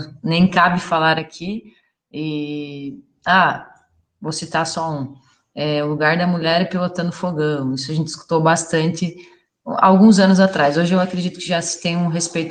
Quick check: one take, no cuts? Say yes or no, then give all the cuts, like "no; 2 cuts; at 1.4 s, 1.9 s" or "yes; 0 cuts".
yes; 0 cuts